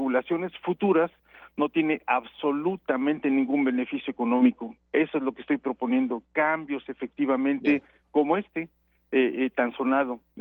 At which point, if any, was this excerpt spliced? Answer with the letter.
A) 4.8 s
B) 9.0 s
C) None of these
C